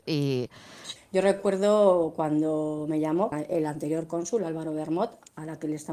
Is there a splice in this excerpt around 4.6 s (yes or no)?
no